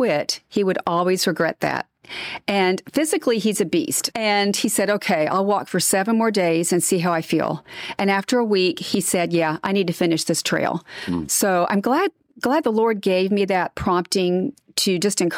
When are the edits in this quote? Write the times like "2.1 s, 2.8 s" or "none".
4.1 s